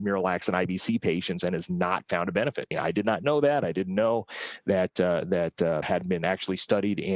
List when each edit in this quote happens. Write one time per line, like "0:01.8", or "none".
0:02.7
0:05.8